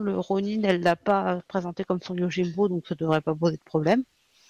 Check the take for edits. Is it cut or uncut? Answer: uncut